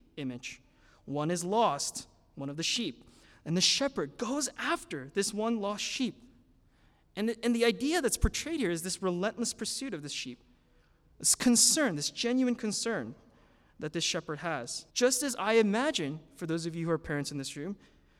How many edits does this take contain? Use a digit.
1